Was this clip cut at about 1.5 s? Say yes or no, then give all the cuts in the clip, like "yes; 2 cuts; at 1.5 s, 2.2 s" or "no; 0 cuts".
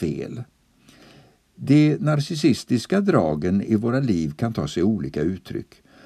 no; 0 cuts